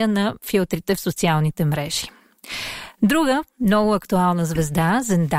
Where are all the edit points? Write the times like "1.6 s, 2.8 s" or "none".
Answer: none